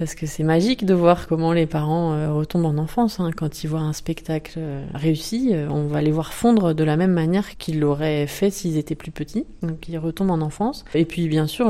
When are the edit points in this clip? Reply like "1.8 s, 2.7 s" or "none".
none